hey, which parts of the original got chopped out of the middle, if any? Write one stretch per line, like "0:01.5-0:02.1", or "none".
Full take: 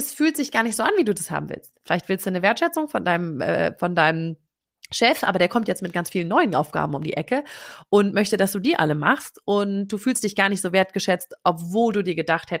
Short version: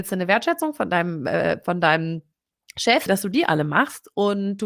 0:05.2-0:08.4